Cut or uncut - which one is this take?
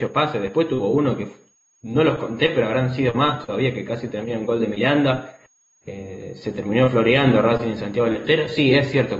uncut